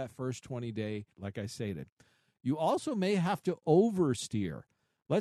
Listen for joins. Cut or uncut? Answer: cut